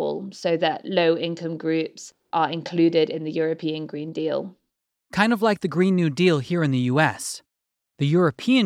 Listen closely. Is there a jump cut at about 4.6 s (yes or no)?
no